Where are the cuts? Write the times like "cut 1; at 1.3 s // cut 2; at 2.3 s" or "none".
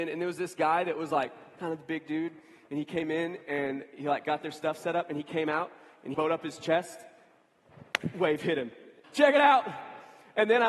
cut 1; at 6.1 s // cut 2; at 9.0 s